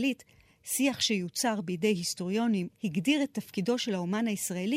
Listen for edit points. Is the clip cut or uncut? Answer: cut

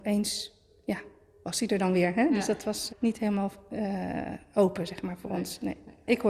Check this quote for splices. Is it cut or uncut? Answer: cut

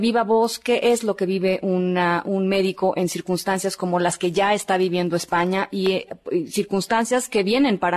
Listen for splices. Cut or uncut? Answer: uncut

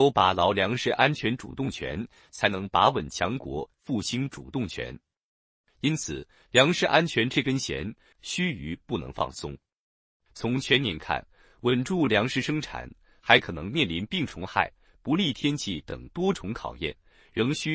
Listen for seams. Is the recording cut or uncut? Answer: cut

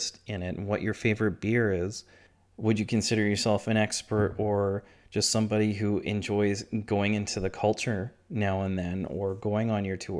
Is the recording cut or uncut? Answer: uncut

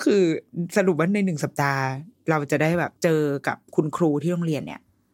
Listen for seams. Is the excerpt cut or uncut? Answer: cut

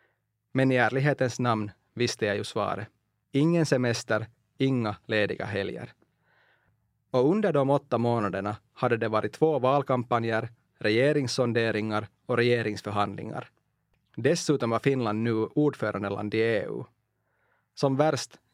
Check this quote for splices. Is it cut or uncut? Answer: cut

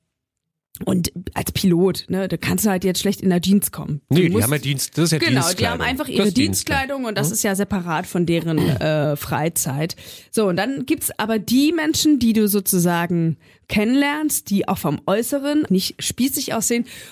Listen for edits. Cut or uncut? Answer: cut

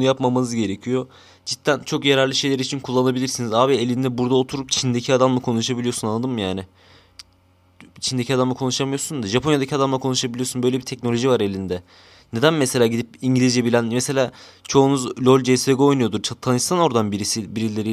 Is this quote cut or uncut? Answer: uncut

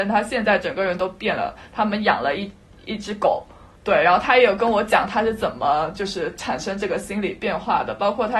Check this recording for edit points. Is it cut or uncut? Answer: uncut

